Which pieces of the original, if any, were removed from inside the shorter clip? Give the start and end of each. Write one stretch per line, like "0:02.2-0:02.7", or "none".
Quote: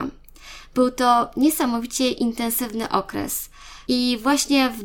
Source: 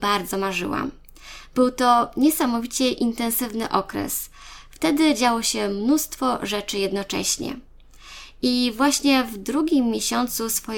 0:04.7-0:08.4